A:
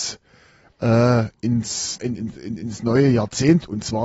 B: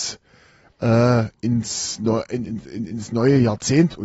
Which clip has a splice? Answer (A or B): A